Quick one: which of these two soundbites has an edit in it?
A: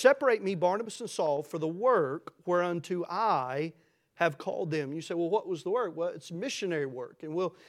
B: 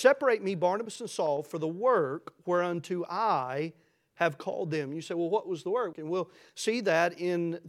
B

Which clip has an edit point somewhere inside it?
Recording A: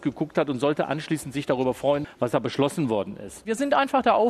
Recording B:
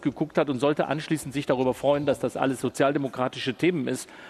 A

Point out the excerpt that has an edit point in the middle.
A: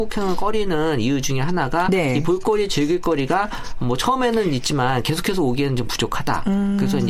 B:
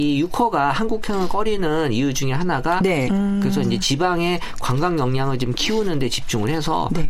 B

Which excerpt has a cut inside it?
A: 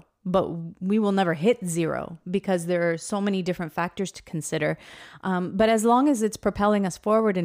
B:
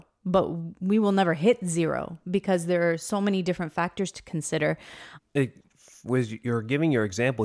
B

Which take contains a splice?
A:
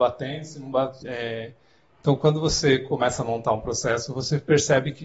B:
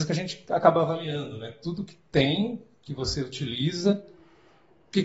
A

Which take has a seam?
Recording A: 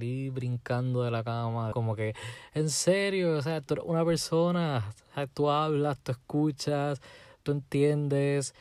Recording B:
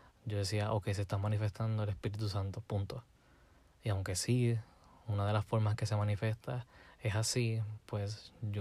A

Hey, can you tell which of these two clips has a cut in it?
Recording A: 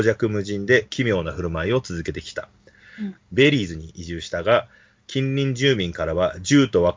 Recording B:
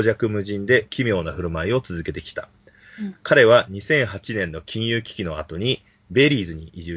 A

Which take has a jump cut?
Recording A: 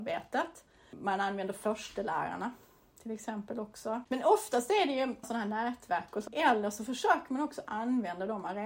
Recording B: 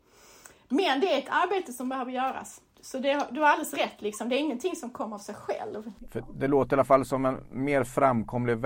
A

